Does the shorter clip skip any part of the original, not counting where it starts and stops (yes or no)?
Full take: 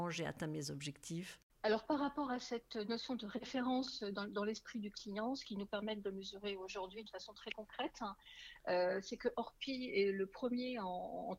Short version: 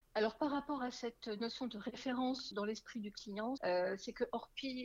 yes